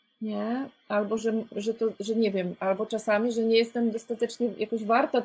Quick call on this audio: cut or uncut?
uncut